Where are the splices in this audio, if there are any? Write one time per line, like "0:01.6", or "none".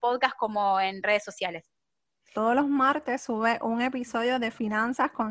0:02.3